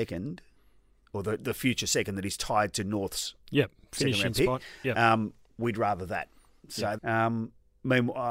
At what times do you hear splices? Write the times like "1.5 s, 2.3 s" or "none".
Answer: 7.0 s